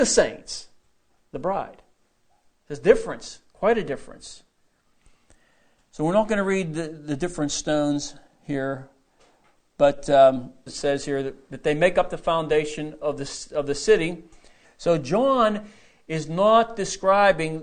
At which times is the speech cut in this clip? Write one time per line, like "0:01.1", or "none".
0:10.7
0:14.6